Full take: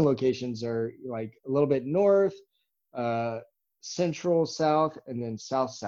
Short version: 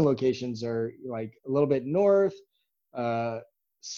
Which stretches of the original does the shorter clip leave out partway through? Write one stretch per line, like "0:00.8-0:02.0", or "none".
none

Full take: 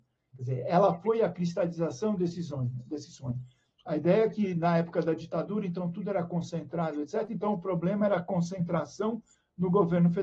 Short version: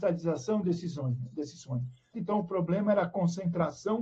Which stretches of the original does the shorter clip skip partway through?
0:03.7-0:07.3

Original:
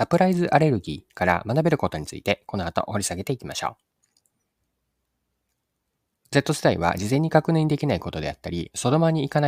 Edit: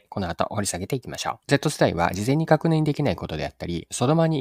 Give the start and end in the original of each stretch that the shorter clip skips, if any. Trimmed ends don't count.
0:03.8-0:06.3

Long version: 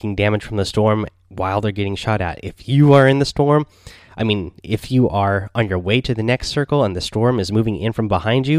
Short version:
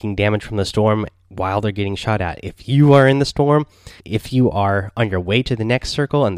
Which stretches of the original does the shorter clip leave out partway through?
0:04.0-0:04.6

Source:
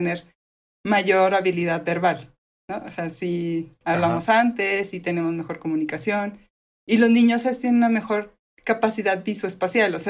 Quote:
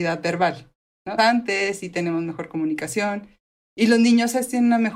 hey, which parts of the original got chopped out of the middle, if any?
0:02.8-0:04.3

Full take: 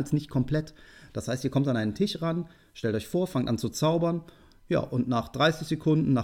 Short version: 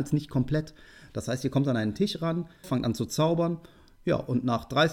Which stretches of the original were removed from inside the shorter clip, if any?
0:02.6-0:03.3

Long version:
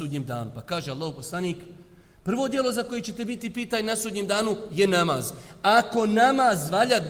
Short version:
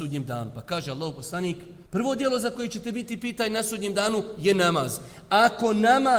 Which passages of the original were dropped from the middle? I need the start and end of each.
0:01.9-0:02.2

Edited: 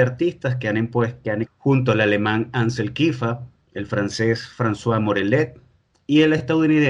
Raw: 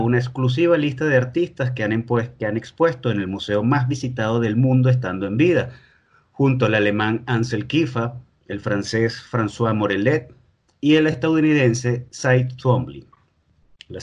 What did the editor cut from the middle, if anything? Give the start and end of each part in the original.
0:02.6-0:06.2

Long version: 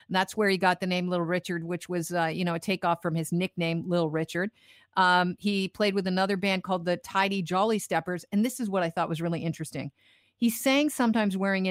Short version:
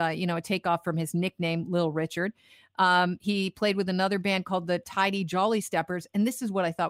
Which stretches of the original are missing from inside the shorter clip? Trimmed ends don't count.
none

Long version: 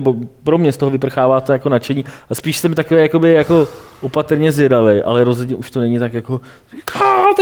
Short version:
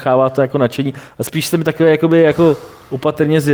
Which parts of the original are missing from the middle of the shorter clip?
none

